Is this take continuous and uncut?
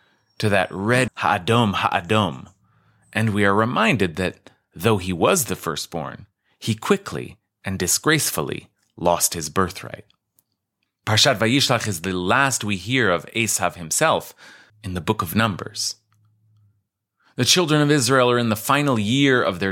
no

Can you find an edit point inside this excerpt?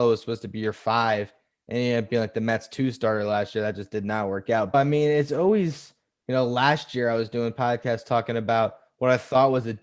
yes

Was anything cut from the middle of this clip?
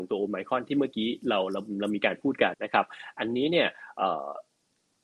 yes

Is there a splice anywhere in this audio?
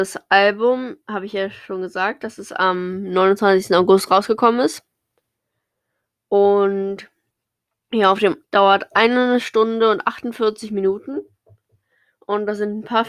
yes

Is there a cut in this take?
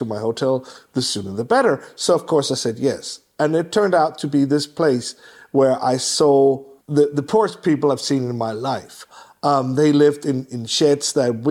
no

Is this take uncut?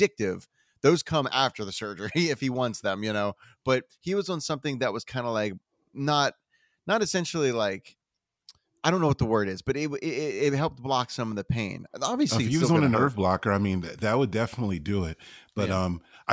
yes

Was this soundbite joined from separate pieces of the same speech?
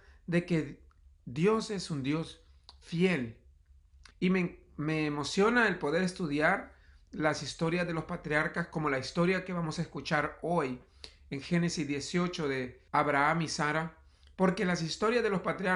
yes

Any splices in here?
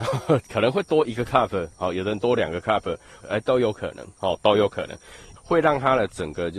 yes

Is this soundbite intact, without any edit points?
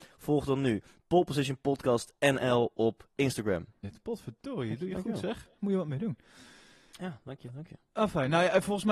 no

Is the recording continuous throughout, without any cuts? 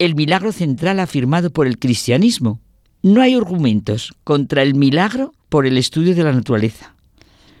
no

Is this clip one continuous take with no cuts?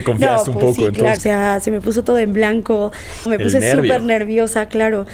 no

